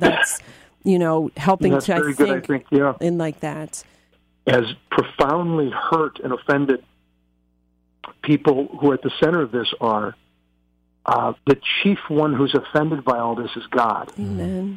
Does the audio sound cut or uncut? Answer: cut